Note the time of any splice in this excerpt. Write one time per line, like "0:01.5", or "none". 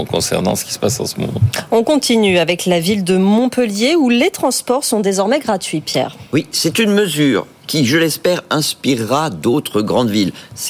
none